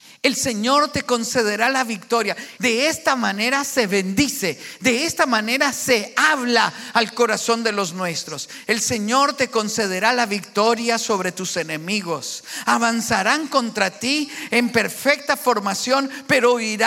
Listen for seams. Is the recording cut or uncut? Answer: cut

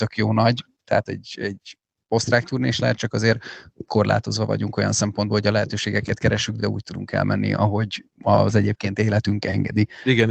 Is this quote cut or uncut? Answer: uncut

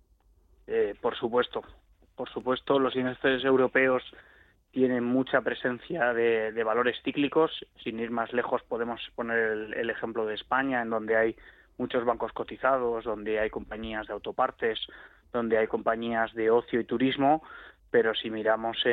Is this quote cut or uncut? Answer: uncut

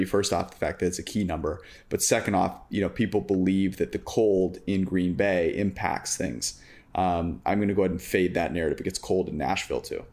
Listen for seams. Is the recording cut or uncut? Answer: uncut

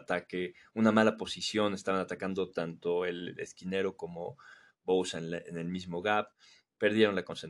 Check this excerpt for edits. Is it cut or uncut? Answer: uncut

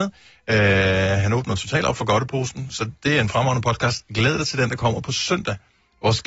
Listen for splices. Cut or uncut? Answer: uncut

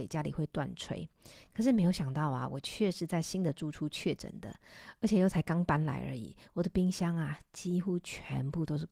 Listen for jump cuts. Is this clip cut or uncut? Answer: uncut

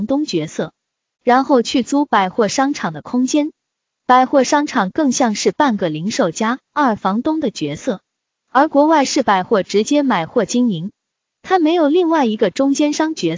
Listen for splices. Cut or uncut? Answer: cut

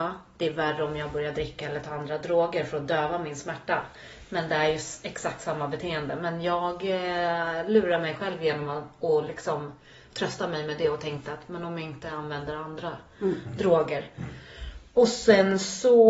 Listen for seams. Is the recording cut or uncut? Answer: uncut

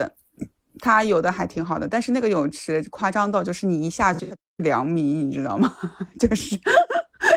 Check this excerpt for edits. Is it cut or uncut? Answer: uncut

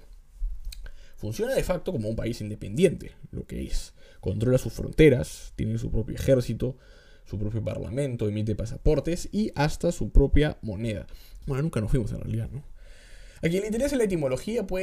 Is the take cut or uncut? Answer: cut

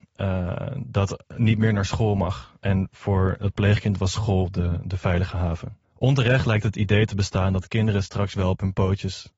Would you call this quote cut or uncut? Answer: cut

